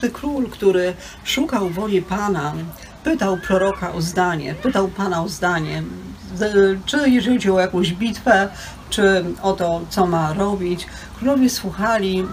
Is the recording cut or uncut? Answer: uncut